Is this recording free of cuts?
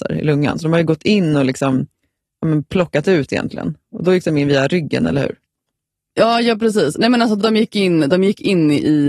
yes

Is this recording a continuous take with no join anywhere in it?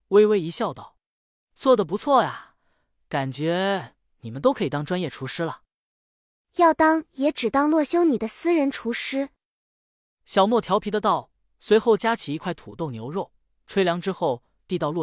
yes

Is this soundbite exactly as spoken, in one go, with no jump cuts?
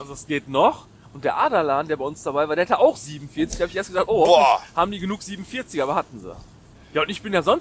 yes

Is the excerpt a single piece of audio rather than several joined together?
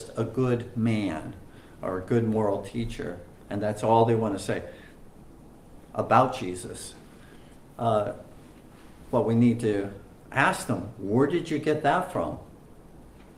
yes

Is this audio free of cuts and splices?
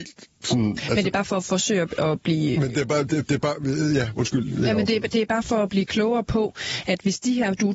yes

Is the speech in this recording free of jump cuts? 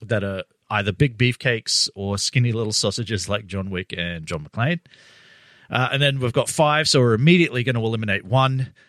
yes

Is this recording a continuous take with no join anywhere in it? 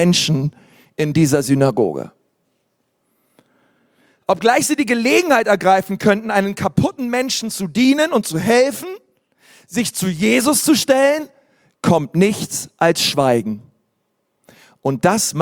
yes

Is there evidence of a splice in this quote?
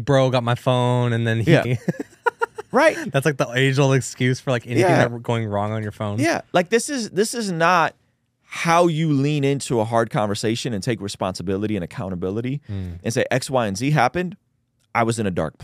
yes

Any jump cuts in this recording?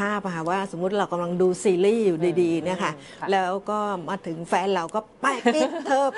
yes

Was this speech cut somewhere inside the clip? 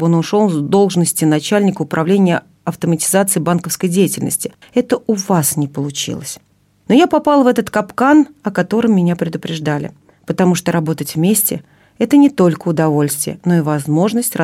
yes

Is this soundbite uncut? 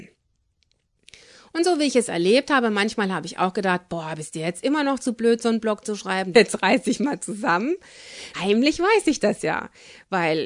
no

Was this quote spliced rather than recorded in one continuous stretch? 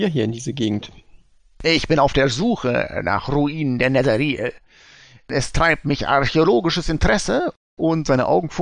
no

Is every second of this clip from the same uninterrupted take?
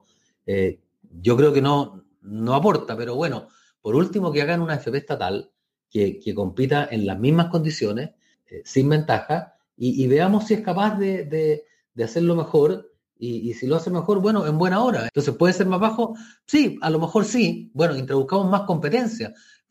no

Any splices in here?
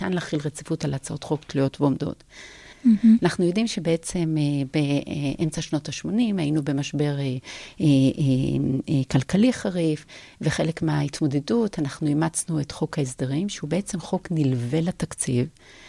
yes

